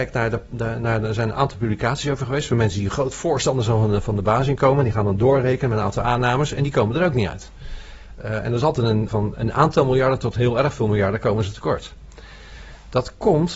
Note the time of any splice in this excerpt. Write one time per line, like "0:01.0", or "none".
0:09.1